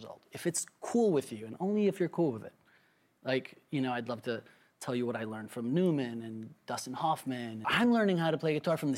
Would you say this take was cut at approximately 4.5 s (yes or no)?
no